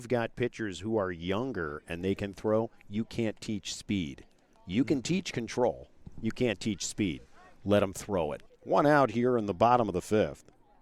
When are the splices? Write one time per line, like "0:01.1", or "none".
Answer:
0:08.5